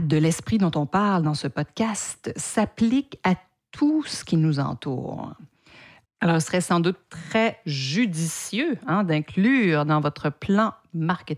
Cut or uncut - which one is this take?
cut